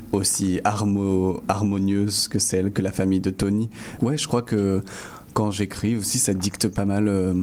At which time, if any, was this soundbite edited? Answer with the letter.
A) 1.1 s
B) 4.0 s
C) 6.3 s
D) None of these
B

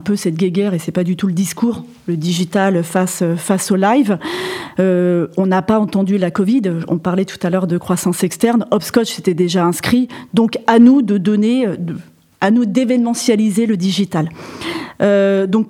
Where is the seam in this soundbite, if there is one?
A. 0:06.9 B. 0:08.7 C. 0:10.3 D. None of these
C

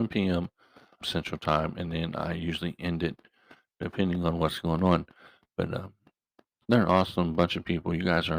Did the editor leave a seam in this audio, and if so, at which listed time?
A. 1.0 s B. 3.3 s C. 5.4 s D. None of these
A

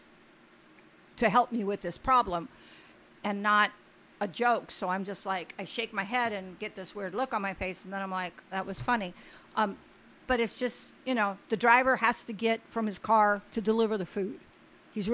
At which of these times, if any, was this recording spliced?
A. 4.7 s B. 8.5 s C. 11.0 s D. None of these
B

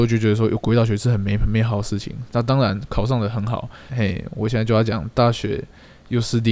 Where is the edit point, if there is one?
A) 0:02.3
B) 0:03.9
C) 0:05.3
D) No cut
B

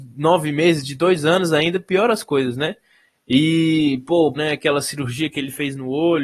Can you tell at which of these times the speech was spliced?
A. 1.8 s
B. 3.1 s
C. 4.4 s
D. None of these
C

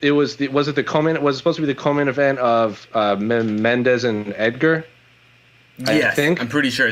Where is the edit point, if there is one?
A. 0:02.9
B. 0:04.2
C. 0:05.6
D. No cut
D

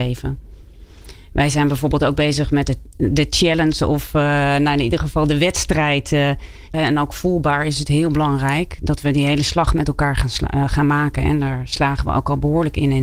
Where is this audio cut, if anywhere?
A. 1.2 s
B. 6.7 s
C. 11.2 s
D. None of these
B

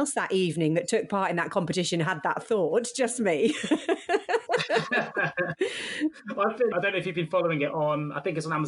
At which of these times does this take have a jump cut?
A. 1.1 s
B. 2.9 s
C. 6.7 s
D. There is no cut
C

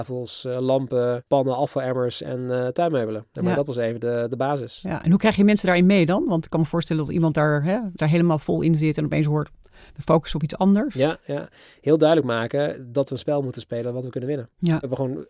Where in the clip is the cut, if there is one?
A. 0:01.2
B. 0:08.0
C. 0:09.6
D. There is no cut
B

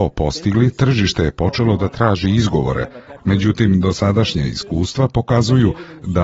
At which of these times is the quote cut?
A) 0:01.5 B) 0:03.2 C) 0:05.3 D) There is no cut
B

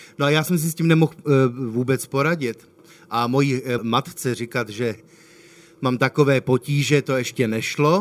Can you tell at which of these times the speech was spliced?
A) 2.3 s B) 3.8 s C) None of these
B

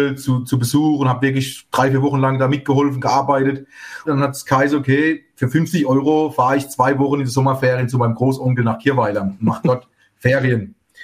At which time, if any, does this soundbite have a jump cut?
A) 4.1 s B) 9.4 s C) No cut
A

